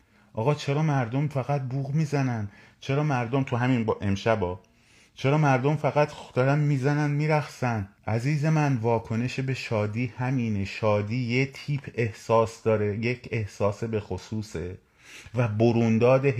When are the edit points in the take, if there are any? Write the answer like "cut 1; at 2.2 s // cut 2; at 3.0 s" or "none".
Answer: cut 1; at 8.0 s